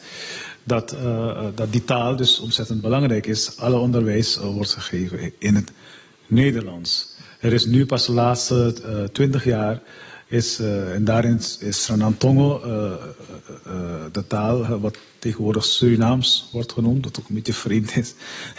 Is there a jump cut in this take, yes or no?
no